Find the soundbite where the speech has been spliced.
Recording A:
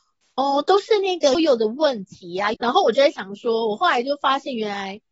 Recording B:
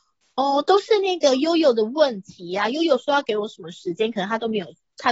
A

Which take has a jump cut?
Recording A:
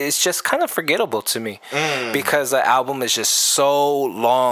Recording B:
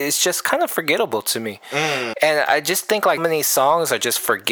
B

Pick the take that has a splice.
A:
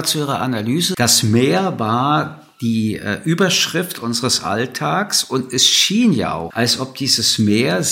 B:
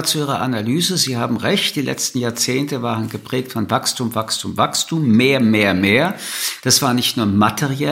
A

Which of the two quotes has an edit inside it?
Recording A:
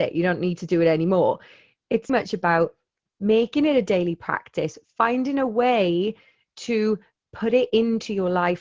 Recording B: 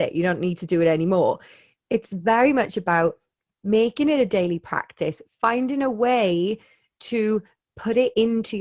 A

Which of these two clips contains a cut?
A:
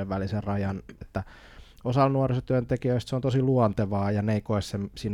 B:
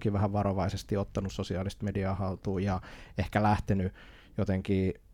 A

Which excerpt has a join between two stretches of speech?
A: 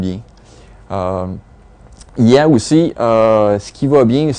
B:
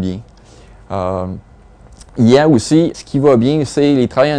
B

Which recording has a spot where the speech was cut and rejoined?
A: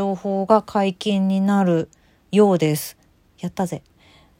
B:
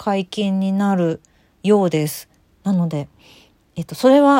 B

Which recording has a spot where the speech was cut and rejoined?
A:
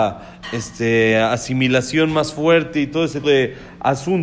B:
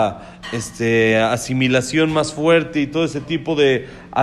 A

